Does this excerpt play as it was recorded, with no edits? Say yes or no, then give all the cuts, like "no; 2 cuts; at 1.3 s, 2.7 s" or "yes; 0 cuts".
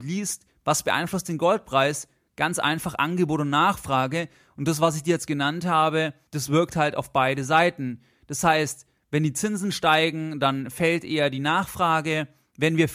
yes; 0 cuts